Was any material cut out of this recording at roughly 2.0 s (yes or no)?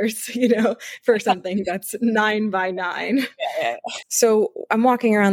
no